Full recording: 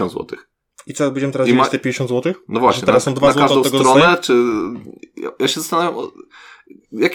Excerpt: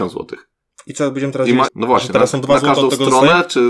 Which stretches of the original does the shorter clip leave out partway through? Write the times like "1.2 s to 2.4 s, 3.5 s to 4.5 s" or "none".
1.7 s to 2.4 s